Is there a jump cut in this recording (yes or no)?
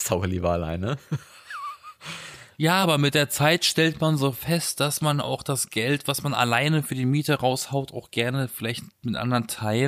no